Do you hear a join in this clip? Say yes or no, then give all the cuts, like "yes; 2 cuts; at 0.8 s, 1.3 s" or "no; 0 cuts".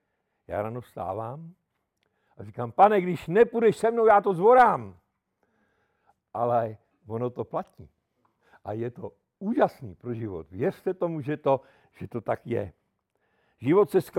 no; 0 cuts